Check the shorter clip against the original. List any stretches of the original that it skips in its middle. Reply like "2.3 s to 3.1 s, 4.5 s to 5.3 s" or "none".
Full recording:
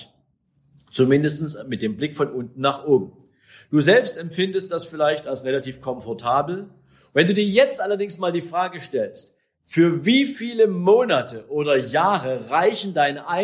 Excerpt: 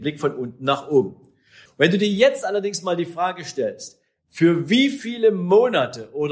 3.6 s to 7.0 s